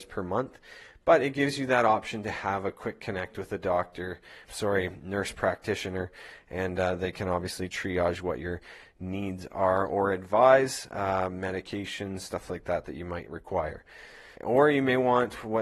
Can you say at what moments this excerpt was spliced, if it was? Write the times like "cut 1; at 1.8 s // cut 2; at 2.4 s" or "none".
cut 1; at 4.4 s // cut 2; at 14.4 s